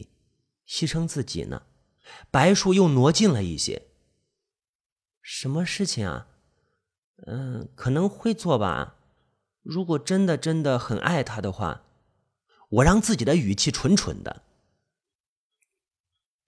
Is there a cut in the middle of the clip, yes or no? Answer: no